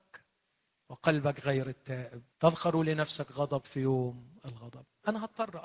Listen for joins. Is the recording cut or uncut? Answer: cut